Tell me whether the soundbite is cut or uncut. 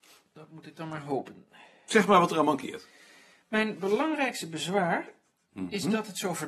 uncut